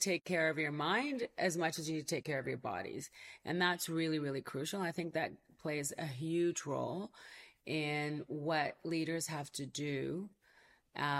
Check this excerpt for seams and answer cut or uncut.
uncut